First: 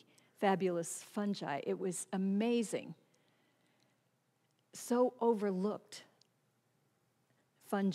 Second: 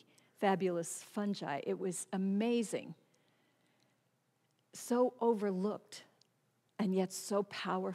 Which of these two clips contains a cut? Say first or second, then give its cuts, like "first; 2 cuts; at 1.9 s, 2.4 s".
second; 1 cut; at 6.7 s